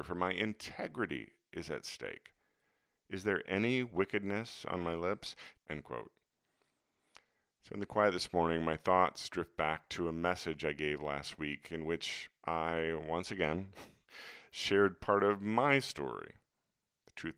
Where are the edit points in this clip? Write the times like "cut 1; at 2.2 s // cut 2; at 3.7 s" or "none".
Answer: cut 1; at 5.6 s